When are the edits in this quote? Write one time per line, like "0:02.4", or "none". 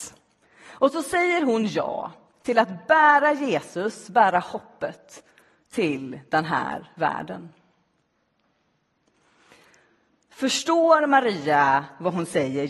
none